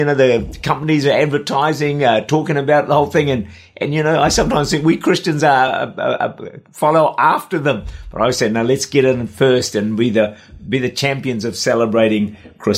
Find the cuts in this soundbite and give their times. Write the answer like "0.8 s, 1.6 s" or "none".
none